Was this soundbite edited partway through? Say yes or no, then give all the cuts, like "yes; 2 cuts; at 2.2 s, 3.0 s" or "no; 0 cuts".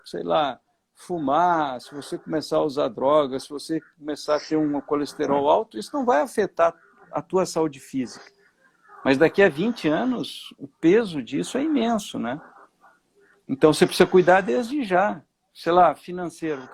no; 0 cuts